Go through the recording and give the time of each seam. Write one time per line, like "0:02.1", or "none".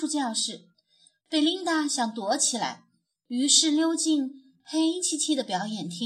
none